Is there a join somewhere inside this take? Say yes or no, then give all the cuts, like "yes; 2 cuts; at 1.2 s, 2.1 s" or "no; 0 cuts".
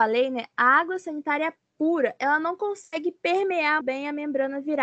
yes; 1 cut; at 3.8 s